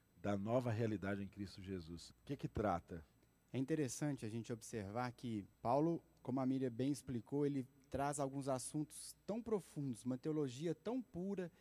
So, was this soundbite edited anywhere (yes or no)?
yes